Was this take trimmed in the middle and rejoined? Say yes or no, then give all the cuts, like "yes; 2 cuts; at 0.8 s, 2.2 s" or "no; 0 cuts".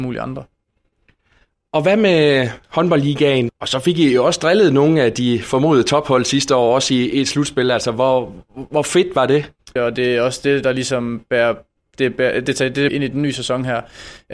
yes; 3 cuts; at 3.5 s, 9.8 s, 12.9 s